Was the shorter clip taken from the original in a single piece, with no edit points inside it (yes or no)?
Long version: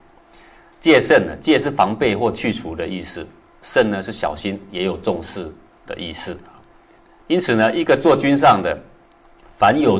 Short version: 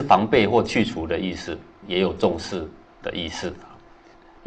no